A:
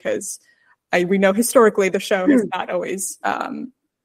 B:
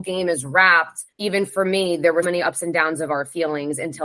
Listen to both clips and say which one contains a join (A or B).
B